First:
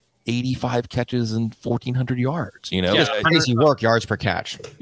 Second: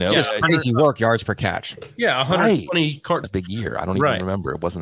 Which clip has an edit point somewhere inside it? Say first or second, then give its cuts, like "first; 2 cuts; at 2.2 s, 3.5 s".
second; 1 cut; at 3.2 s